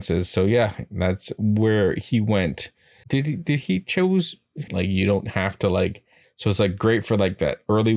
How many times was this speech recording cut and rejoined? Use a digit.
2